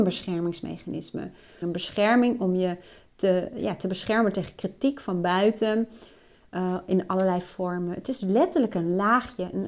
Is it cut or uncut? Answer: cut